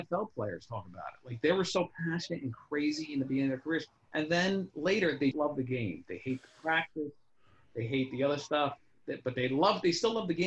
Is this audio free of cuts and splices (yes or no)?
no